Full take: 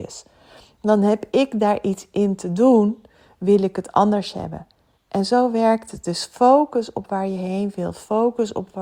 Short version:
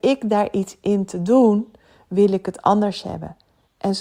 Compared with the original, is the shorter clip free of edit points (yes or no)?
yes